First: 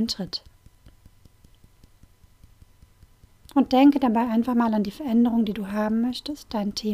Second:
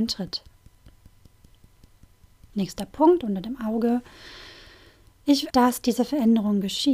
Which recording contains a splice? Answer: second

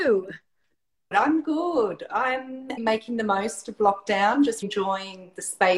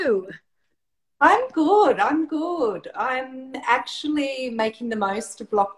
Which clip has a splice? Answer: first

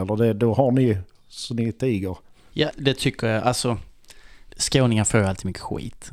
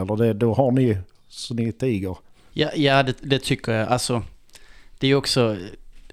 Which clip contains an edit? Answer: first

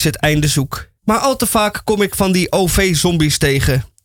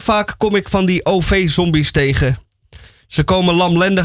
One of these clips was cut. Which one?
first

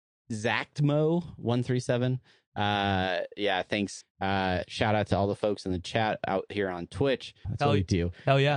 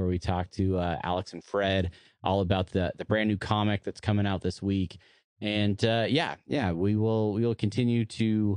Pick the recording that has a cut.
first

